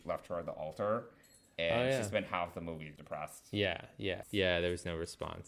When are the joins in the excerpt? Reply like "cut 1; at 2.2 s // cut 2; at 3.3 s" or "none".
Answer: cut 1; at 3.0 s // cut 2; at 4.2 s